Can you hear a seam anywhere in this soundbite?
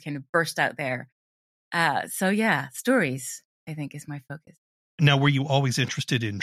no; 0 cuts

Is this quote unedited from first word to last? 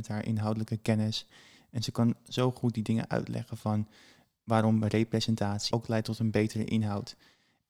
no; 1 cut; at 5.7 s

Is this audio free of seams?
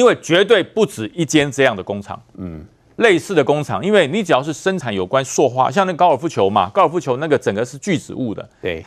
yes; 0 cuts

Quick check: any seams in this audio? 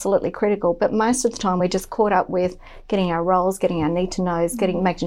no; 0 cuts

